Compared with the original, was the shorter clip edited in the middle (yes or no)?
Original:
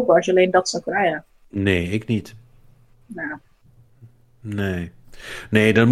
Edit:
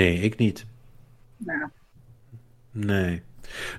no